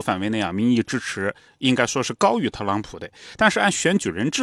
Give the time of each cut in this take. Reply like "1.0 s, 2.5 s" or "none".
none